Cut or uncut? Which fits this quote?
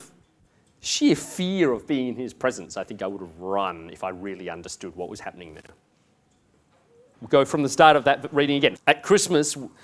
cut